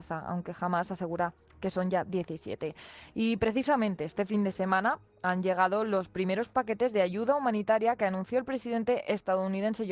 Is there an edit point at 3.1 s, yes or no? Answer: no